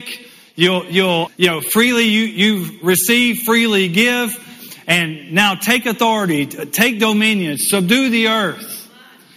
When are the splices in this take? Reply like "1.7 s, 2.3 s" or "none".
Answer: 1.3 s

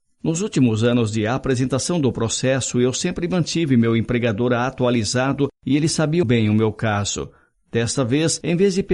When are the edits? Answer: 6.2 s

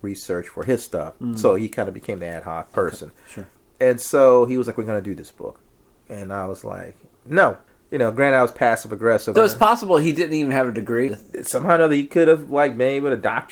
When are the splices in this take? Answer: 9.3 s, 11.1 s

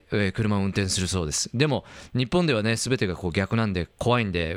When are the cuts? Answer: none

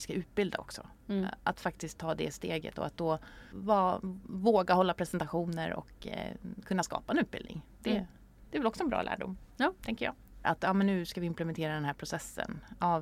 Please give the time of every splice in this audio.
3.5 s, 10.4 s

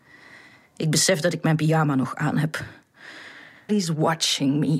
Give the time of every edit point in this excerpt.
3.7 s

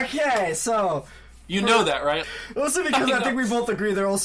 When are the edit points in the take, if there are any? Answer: 2.2 s

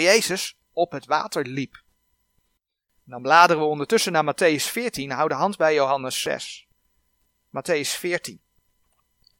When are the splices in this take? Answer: none

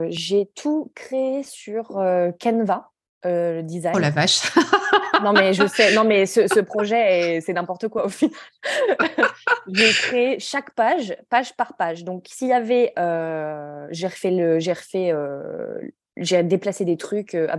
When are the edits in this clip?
none

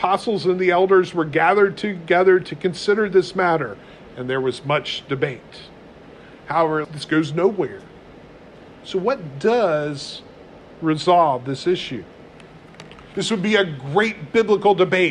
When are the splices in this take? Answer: 6.8 s, 13.1 s

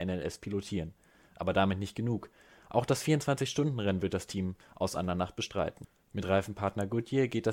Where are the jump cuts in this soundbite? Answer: none

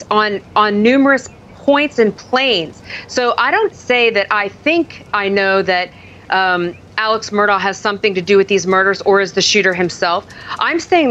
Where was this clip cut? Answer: 3.7 s

